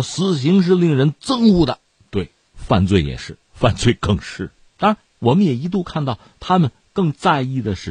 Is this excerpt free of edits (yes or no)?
no